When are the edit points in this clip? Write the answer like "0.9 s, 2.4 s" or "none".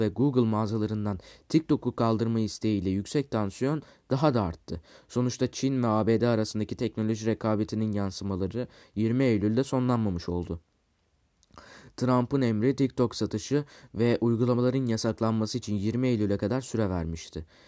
none